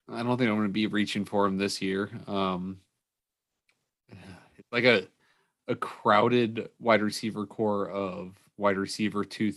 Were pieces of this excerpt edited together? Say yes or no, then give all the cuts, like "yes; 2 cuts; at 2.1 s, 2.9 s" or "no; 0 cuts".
no; 0 cuts